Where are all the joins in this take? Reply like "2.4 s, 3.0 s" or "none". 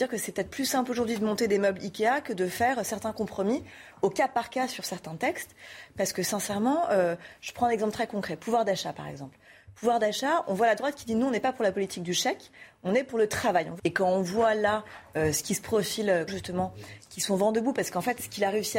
13.8 s, 16.3 s